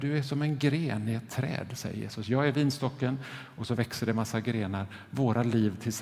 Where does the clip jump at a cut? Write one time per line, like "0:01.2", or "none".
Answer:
none